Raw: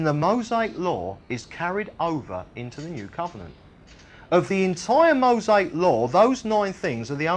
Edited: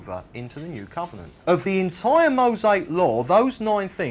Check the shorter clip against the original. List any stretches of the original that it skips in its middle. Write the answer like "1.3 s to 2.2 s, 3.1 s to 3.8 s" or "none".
3.6 s to 4.2 s